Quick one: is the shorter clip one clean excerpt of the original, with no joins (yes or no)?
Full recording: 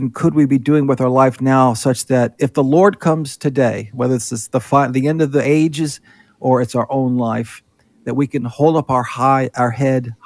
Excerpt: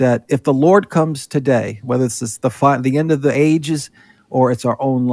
yes